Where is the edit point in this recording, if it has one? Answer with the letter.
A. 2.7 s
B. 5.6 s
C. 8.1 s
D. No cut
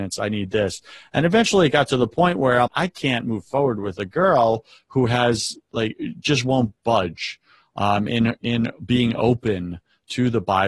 A